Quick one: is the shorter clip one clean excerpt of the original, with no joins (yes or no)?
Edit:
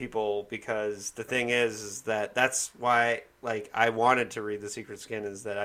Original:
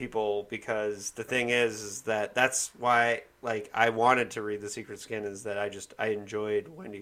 yes